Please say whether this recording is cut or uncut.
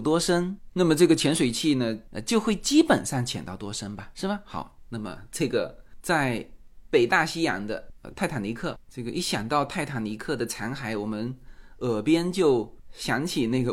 uncut